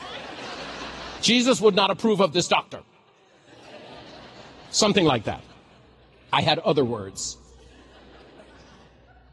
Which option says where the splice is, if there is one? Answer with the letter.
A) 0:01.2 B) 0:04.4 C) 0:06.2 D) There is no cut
A